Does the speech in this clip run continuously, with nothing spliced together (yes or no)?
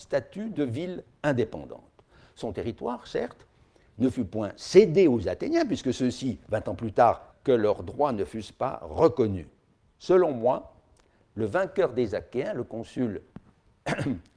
no